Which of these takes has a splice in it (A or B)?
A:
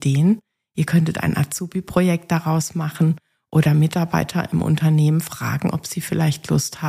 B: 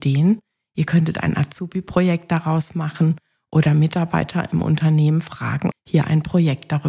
B